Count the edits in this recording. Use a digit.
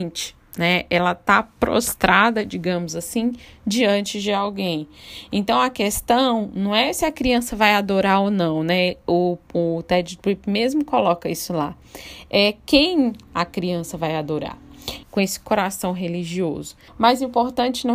2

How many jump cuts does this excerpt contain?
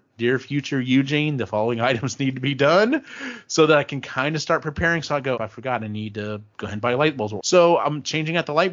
2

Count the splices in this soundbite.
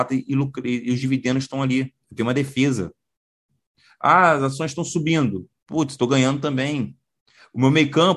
1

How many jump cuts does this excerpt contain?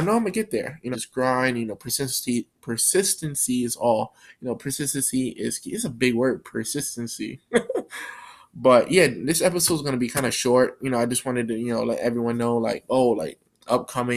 1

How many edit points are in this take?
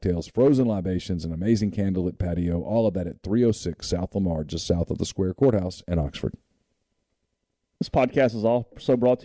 0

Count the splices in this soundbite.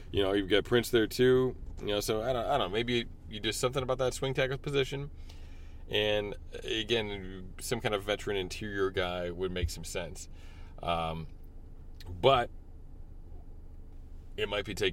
0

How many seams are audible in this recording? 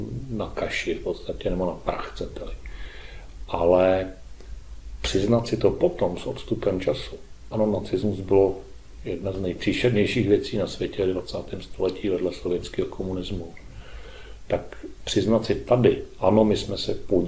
1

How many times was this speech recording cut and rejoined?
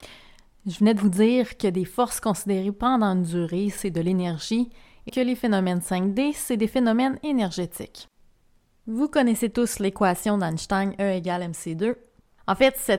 1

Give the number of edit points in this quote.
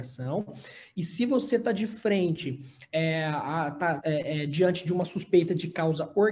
1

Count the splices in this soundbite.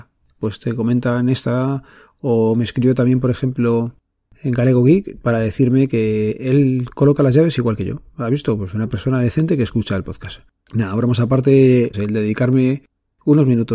2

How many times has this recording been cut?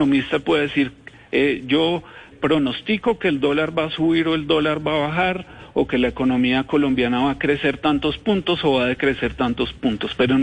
1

